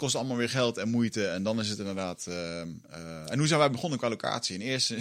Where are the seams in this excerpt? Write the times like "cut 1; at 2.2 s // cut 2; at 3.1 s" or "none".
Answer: none